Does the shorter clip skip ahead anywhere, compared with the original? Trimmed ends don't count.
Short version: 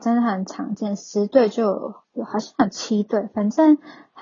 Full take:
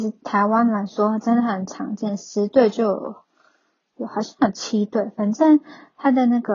yes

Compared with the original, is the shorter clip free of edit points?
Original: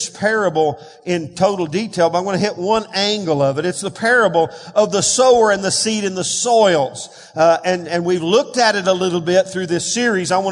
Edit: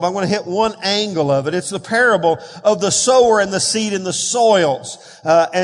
yes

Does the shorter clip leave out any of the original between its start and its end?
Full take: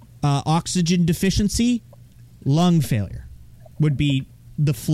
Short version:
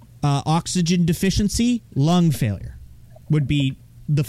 yes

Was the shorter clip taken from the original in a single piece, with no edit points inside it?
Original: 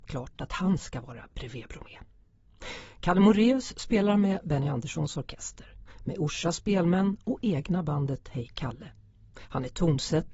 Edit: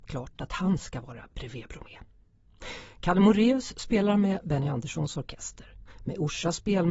yes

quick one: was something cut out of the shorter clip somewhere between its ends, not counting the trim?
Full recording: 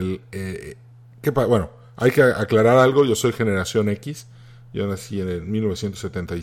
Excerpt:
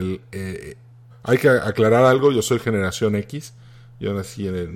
yes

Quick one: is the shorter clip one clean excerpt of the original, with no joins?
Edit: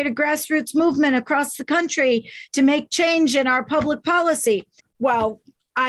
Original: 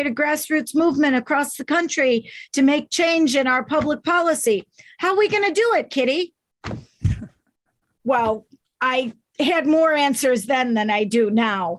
no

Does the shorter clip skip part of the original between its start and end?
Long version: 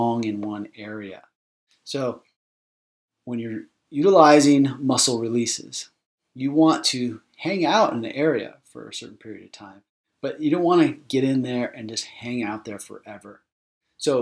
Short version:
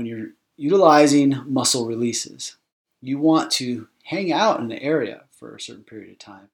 no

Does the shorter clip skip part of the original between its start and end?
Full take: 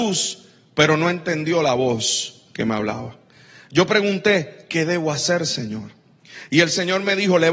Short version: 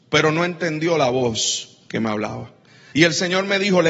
yes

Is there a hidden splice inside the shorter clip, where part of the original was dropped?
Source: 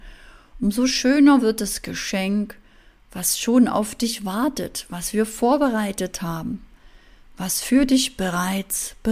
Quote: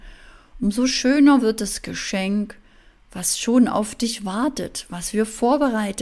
no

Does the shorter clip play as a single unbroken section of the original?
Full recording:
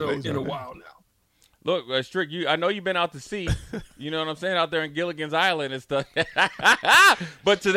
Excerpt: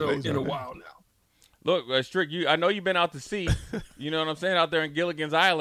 yes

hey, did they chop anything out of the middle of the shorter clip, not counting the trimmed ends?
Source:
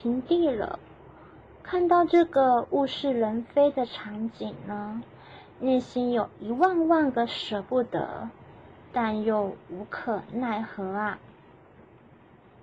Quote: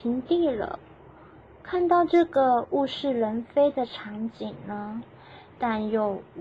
yes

